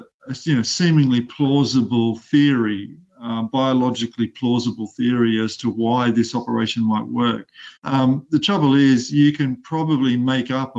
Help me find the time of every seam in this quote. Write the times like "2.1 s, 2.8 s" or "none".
7.8 s